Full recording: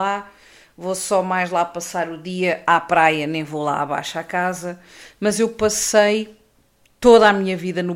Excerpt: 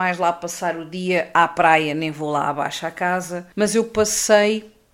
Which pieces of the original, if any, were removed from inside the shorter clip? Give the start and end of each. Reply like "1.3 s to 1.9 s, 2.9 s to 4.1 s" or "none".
4.8 s to 5.2 s